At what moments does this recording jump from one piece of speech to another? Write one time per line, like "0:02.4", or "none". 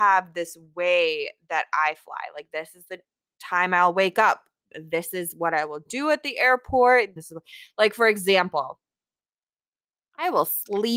0:04.7
0:07.2